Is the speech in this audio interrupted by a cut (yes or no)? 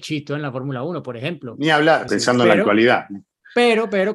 yes